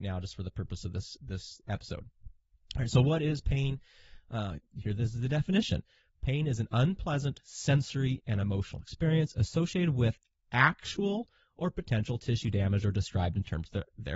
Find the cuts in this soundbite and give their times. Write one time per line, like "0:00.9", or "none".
0:04.6